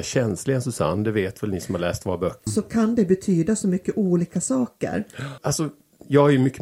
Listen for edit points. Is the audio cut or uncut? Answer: cut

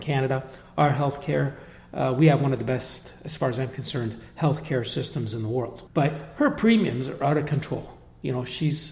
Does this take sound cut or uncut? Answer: cut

